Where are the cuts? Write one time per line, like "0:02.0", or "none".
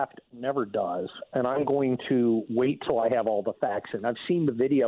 none